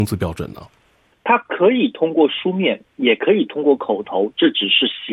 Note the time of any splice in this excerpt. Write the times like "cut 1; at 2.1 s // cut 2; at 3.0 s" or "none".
cut 1; at 1.1 s